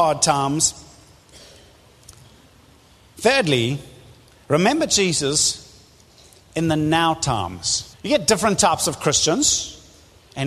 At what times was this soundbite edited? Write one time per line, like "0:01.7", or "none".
0:07.9